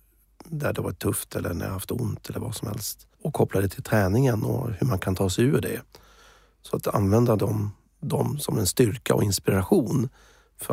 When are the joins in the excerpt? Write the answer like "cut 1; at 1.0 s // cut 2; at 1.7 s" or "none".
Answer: cut 1; at 3.1 s